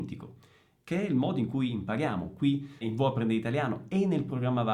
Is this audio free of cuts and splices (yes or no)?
no